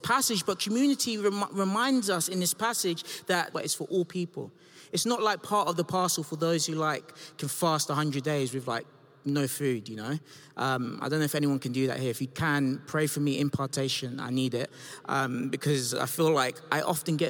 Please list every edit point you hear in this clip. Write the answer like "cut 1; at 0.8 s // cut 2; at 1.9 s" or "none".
cut 1; at 3.5 s